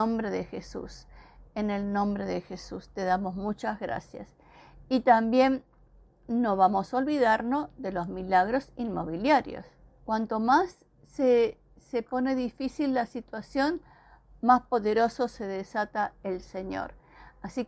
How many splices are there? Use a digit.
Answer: 1